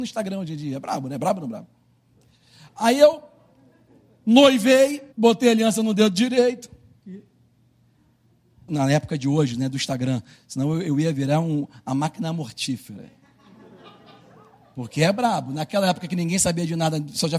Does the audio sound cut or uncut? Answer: cut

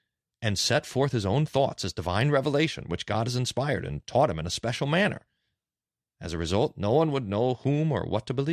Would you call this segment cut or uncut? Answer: uncut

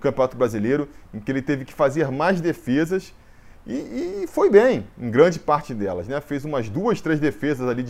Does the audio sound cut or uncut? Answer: uncut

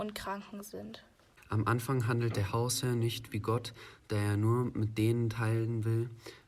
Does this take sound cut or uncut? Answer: uncut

